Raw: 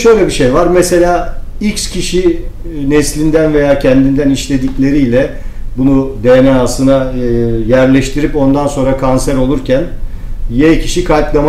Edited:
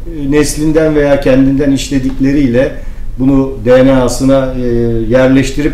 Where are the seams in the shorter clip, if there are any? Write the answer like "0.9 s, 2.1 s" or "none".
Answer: none